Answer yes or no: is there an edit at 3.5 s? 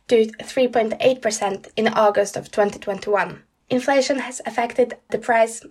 yes